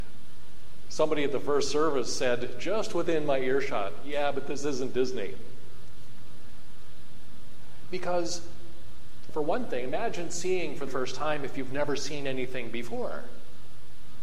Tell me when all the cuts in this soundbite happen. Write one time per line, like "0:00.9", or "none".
0:09.3
0:10.9